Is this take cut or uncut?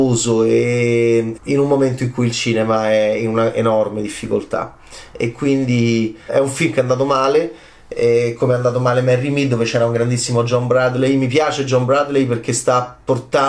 cut